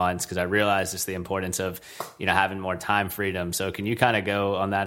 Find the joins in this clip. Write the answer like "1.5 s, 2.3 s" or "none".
none